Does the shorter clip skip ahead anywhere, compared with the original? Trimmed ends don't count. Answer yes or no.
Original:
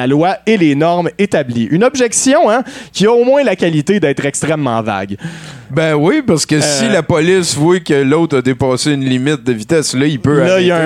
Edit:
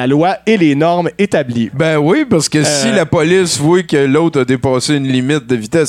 yes